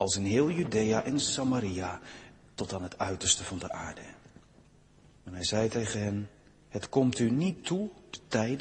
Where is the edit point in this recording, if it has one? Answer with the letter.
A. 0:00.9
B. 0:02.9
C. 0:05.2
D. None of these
C